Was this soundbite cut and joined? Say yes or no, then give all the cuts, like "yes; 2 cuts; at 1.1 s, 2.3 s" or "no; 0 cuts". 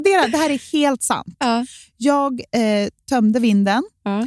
no; 0 cuts